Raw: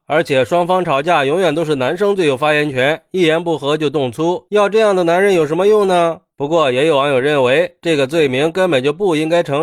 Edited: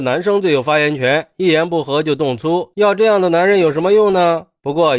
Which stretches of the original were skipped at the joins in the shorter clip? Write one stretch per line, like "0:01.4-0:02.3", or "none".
none